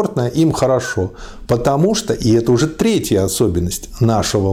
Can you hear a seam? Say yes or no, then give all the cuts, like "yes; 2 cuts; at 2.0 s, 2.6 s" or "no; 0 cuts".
yes; 1 cut; at 1.5 s